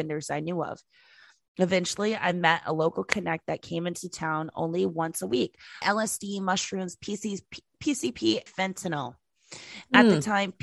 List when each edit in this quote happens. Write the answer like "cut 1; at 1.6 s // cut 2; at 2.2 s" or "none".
cut 1; at 5.8 s // cut 2; at 8.5 s